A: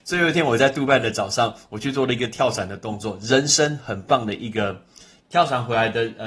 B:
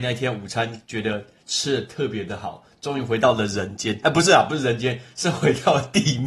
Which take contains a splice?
A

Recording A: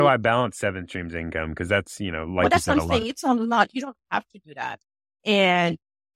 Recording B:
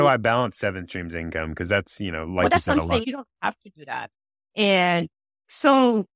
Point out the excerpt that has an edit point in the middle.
B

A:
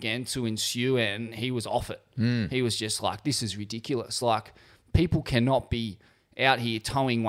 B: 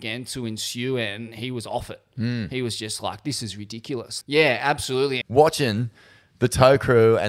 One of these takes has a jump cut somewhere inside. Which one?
B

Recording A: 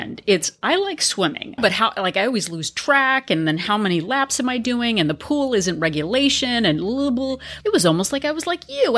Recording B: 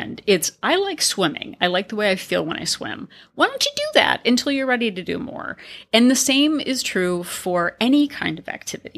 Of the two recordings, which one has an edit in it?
A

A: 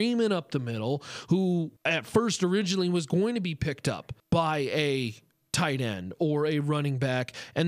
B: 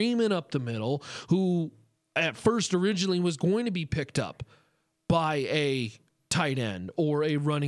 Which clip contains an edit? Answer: A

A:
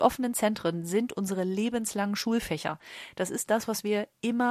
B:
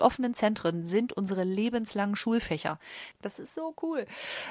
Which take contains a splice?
B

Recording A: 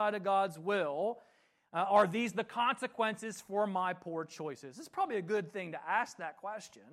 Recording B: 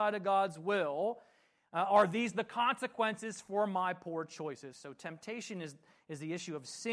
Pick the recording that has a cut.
B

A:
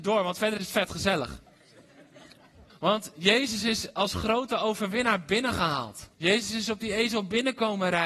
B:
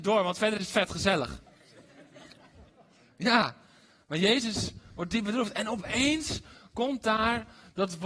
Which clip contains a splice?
A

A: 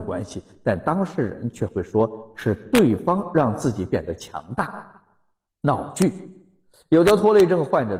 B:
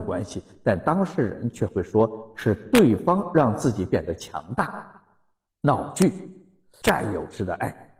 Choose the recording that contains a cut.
B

